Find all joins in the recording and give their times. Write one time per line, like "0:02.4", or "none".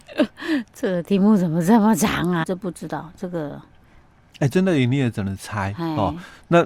0:02.4